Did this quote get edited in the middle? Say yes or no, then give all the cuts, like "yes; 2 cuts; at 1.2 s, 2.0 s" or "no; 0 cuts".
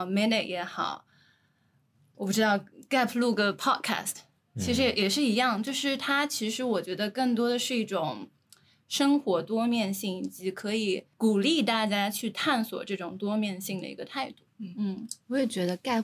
no; 0 cuts